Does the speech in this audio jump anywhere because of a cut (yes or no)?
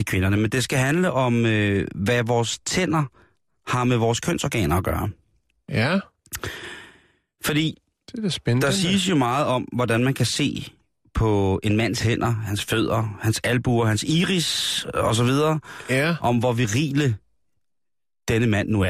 no